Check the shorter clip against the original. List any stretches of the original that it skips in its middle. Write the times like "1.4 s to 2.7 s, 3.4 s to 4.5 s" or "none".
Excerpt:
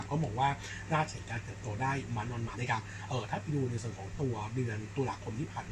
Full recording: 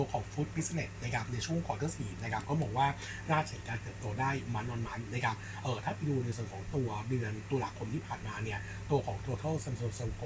4.9 s to 5.1 s